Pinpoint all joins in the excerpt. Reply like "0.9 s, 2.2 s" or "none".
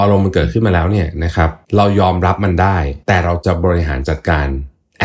1.6 s, 3.0 s

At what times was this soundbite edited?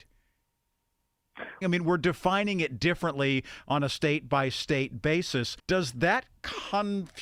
1.6 s, 5.6 s

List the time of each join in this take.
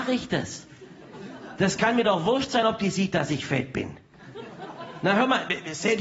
none

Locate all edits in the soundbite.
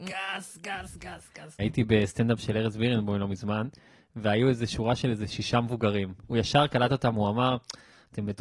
1.6 s

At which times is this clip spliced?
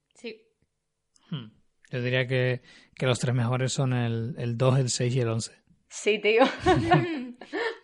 none

